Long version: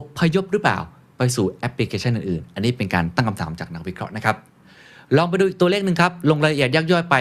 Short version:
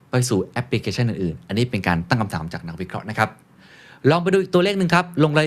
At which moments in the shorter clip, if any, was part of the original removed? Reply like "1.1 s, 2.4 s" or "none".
none